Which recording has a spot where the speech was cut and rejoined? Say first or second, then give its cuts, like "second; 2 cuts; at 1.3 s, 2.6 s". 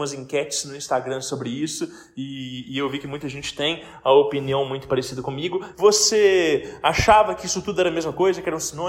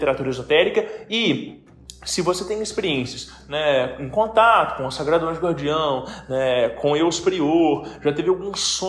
first; 1 cut; at 5.7 s